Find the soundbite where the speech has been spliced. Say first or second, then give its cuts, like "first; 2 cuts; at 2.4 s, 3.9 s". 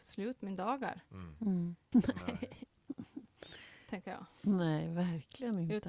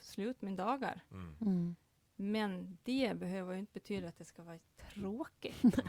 first; 1 cut; at 1.9 s